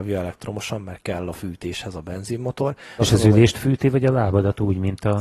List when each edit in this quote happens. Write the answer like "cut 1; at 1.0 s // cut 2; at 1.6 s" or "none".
cut 1; at 3.0 s